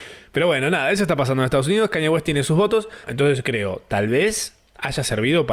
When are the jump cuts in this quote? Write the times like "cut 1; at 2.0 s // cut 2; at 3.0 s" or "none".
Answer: cut 1; at 3.0 s